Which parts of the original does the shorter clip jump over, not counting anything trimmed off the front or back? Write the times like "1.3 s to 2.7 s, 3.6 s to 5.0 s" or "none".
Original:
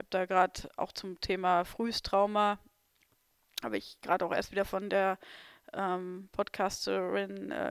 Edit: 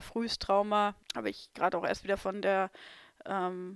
2.7 s to 3.5 s